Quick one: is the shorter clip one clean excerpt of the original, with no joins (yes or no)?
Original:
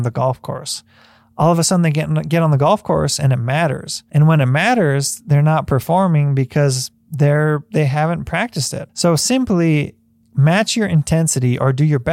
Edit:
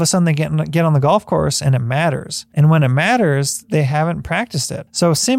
no